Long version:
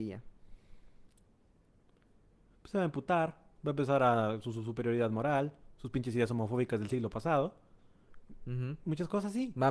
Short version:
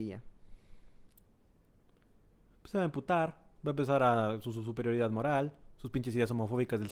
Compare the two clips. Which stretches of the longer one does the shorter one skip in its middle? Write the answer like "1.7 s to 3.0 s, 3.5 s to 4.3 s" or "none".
none